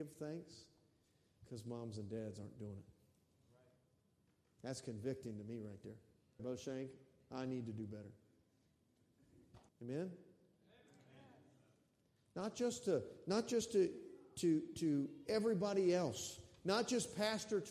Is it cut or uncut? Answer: cut